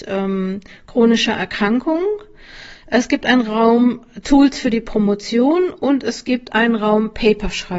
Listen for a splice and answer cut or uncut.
uncut